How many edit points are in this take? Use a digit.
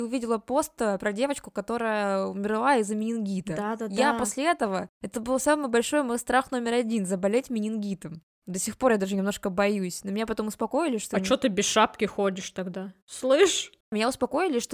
1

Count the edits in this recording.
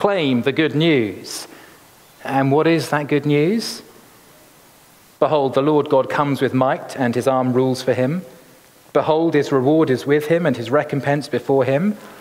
0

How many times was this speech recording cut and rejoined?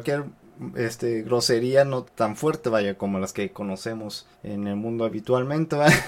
2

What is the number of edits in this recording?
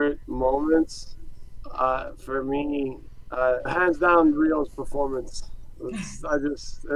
1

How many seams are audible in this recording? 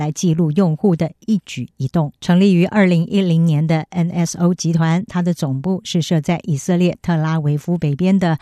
1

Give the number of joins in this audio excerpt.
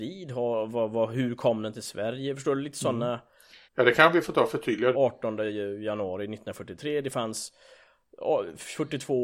2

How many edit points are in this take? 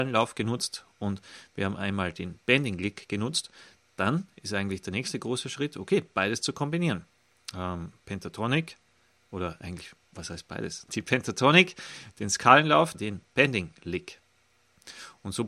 2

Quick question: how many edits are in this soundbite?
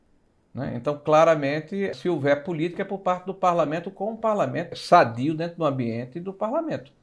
2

